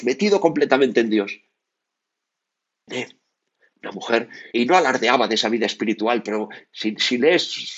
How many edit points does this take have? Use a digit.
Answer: 2